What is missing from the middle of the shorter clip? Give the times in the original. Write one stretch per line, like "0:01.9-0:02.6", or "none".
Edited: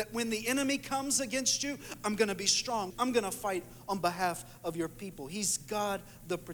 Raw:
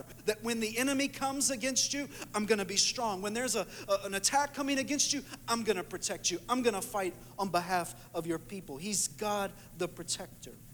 0:03.2-0:06.4